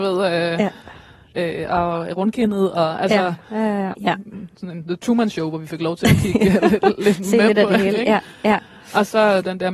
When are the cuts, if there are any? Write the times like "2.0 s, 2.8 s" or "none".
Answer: 3.9 s